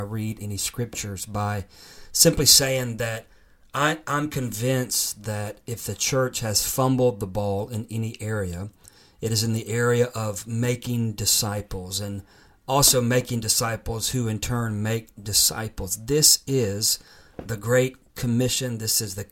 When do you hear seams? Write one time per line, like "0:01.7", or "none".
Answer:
none